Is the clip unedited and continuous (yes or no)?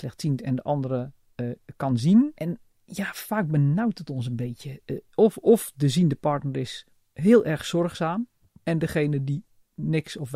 yes